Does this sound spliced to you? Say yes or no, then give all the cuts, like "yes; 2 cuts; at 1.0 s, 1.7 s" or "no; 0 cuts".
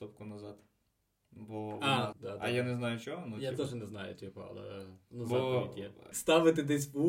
yes; 2 cuts; at 2.1 s, 6.1 s